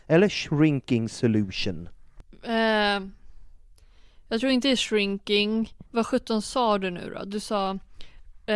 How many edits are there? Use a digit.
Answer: 1